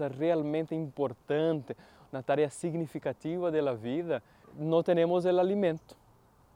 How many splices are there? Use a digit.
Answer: 1